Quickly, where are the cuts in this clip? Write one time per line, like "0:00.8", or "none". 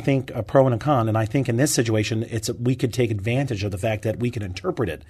none